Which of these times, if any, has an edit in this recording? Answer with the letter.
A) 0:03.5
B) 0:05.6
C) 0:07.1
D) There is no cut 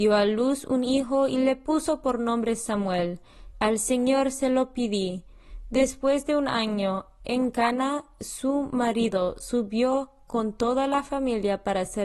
A